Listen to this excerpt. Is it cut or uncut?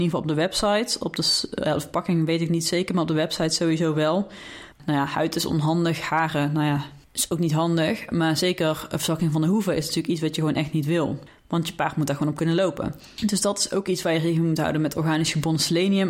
cut